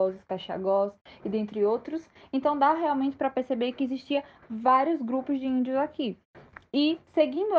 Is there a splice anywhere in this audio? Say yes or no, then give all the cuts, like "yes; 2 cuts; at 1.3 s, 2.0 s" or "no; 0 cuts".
no; 0 cuts